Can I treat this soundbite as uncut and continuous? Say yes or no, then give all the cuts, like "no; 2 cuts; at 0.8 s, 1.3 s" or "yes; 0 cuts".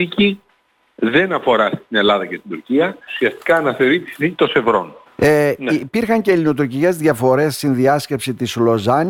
no; 2 cuts; at 3.1 s, 5.1 s